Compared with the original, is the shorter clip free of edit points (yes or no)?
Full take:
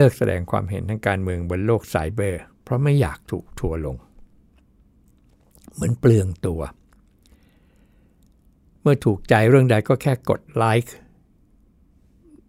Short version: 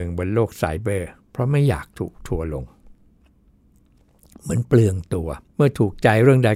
no